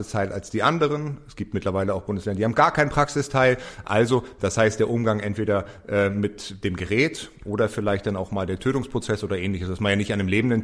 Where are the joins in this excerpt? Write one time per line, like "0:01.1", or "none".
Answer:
none